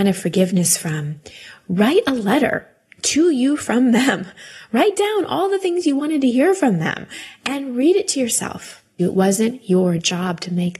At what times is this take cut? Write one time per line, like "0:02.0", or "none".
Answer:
0:09.0